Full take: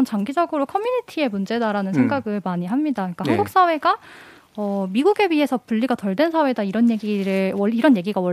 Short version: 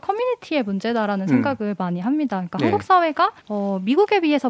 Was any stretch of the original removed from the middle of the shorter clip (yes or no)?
yes